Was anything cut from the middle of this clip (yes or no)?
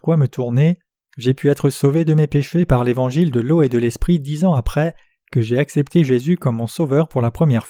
yes